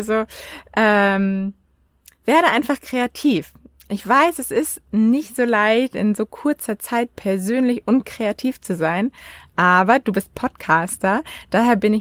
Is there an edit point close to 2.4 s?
no; 0 cuts

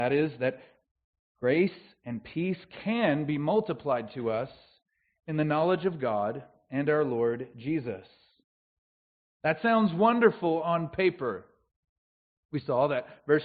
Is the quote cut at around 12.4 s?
yes; 1 cut; at 12.4 s

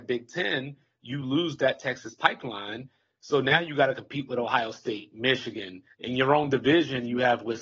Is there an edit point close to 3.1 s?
no; 1 cut; at 5.9 s

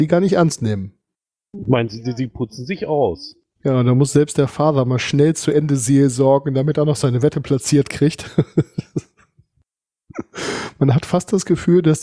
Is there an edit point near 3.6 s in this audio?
yes; 1 cut; at 3.6 s

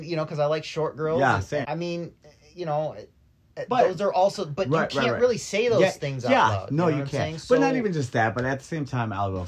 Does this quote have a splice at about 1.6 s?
yes; 1 cut; at 1.6 s

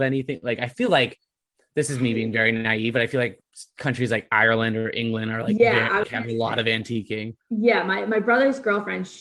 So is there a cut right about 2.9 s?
no; 2 cuts; at 6.0 s, 7.4 s

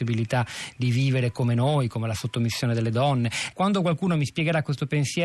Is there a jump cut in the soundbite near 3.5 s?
yes; 1 cut; at 3.5 s

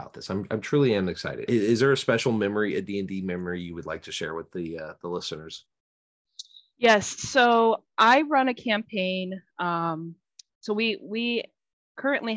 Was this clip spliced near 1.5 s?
yes; 1 cut; at 1.5 s

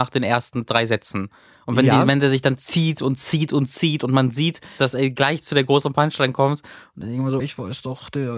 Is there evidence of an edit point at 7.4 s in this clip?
yes; 2 cuts; at 4.8 s, 7.4 s

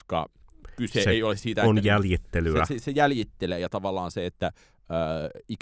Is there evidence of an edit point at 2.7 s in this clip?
no; 0 cuts

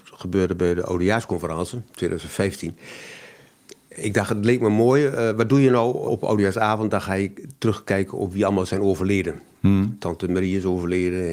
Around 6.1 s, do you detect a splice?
yes; 1 cut; at 6.1 s

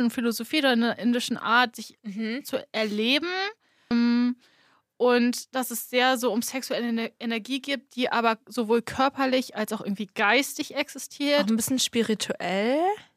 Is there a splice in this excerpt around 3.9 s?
yes; 1 cut; at 3.9 s

